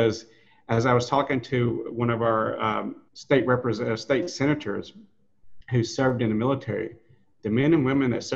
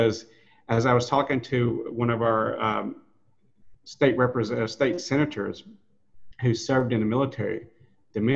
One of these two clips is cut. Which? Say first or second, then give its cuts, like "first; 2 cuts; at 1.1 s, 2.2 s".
first; 1 cut; at 3.1 s